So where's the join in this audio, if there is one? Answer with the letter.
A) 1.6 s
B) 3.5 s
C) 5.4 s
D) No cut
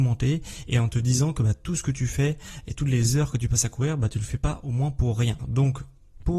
C